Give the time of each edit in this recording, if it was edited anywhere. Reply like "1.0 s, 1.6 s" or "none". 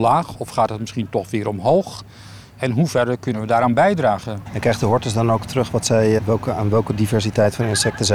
4.5 s, 6.2 s

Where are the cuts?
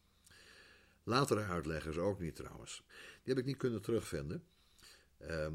2.9 s

